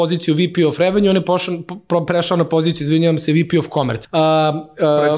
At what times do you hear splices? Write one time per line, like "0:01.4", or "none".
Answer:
0:04.0

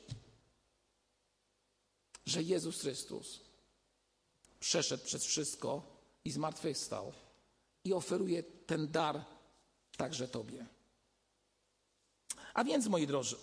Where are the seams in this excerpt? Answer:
none

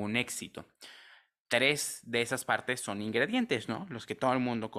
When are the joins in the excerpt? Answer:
none

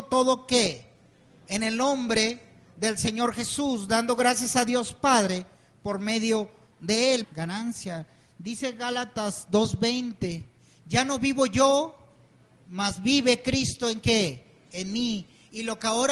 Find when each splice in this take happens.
0:07.2

